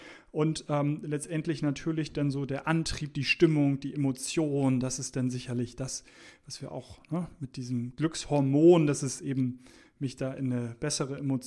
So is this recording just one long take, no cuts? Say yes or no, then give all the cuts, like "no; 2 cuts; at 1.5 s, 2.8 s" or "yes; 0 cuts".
yes; 0 cuts